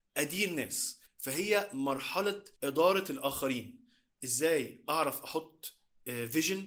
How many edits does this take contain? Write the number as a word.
two